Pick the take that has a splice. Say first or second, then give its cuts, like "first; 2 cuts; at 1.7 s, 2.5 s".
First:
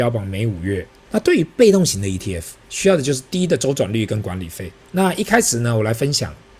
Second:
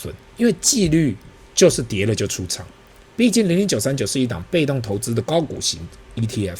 first; 2 cuts; at 1.1 s, 4.8 s